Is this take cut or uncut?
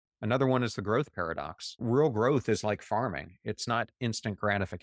uncut